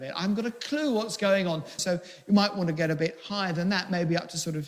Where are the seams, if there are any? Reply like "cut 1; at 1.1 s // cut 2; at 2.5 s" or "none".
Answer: cut 1; at 1.8 s